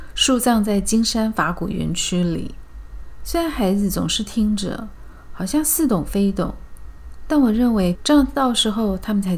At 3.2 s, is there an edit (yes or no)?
no